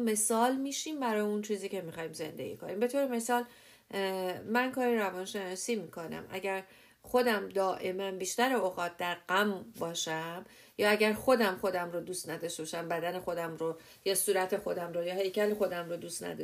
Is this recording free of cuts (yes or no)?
yes